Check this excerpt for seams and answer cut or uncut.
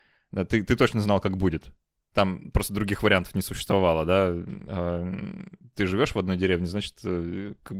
uncut